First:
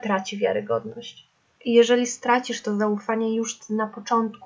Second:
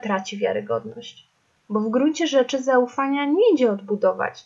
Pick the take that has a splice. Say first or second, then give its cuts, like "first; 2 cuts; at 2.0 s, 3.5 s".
first; 1 cut; at 1.5 s